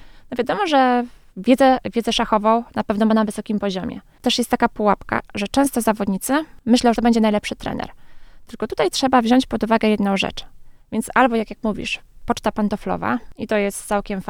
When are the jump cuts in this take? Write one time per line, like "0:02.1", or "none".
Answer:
0:04.2
0:07.0
0:10.8